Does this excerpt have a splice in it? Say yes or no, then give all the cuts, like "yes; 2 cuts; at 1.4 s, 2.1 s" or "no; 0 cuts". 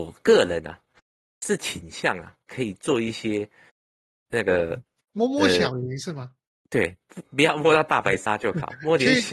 no; 0 cuts